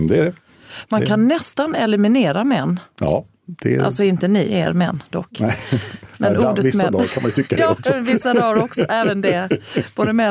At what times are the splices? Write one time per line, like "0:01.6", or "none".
none